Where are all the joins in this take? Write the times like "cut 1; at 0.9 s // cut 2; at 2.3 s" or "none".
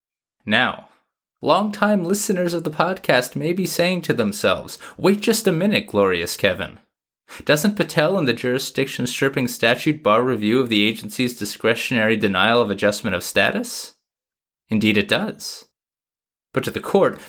none